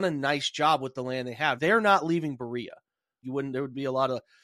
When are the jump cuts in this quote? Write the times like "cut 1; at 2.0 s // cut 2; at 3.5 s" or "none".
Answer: cut 1; at 1.6 s // cut 2; at 3.2 s